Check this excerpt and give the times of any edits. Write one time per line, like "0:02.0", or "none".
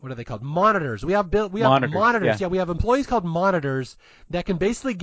none